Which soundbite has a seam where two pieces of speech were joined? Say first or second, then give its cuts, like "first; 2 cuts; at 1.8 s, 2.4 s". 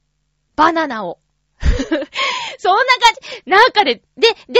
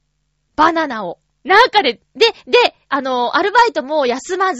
second; 2 cuts; at 1.4 s, 2.8 s